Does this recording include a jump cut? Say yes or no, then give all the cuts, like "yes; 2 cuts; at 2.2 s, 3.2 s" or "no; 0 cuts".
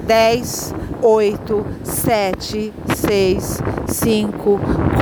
yes; 1 cut; at 1.0 s